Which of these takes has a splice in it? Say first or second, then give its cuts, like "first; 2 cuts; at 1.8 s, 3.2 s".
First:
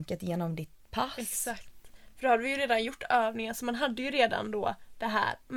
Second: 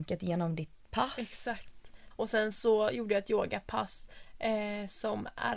second; 1 cut; at 2.1 s